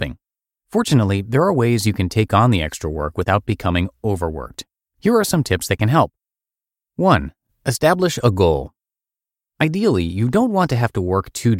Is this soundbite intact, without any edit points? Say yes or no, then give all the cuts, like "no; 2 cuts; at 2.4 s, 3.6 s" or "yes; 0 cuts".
yes; 0 cuts